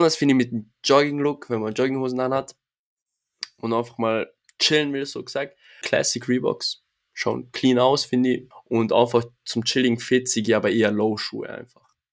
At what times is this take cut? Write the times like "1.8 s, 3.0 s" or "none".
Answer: 5.8 s, 8.5 s